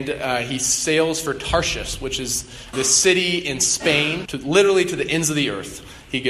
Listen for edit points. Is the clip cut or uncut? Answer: cut